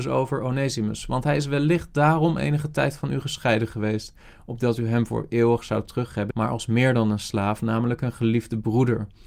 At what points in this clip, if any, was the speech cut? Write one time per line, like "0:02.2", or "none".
0:06.3